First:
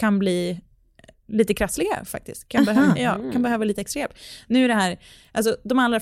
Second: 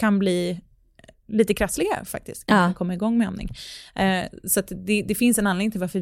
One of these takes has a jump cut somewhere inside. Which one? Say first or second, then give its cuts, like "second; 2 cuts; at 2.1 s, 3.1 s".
second; 1 cut; at 2.5 s